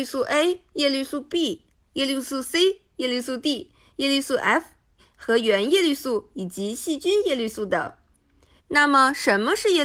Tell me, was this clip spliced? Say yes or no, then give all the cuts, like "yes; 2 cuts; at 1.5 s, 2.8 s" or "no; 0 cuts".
yes; 1 cut; at 8.6 s